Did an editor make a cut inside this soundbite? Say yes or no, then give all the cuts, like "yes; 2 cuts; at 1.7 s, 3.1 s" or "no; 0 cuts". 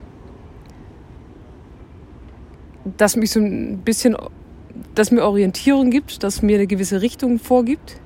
no; 0 cuts